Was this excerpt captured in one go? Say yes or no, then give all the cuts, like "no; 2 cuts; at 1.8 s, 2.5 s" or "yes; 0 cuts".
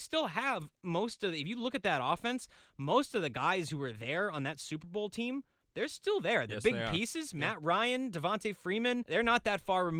yes; 0 cuts